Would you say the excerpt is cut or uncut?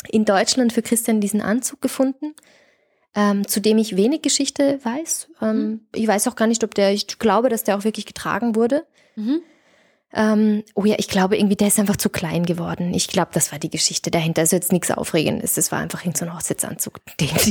uncut